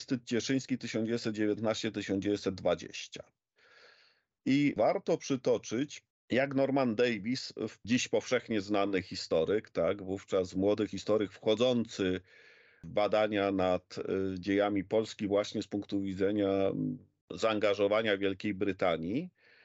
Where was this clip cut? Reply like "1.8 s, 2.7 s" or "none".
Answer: none